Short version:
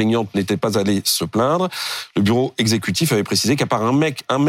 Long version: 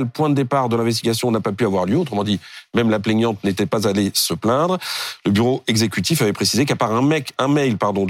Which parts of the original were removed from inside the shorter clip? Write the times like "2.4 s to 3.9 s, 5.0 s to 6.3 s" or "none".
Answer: none